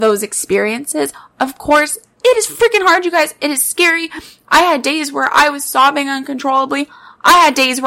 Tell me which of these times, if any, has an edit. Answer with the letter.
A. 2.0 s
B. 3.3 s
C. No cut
A